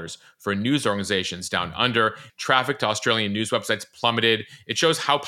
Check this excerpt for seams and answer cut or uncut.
cut